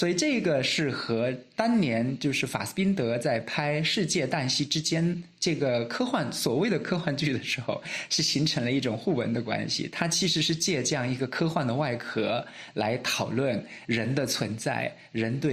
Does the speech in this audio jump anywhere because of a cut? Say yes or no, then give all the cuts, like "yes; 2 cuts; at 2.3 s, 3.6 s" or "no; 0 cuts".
no; 0 cuts